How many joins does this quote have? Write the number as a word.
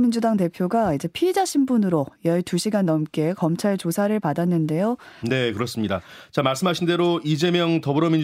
one